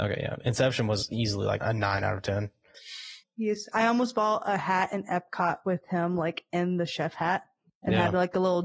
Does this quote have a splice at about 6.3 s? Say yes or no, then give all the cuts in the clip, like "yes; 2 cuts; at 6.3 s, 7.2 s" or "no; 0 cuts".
no; 2 cuts; at 1.6 s, 3.2 s